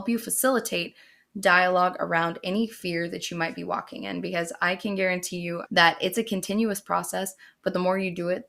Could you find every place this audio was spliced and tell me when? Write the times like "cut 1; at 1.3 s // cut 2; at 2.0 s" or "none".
cut 1; at 5.7 s